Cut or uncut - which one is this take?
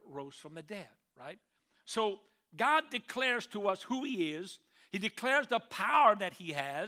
uncut